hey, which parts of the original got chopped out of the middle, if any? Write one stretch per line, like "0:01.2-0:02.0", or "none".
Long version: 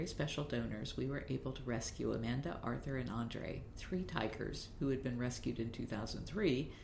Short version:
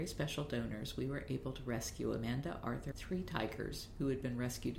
0:02.9-0:03.7